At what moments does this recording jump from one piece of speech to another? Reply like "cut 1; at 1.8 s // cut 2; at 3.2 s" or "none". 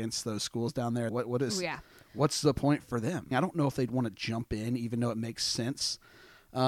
cut 1; at 1.1 s // cut 2; at 3.3 s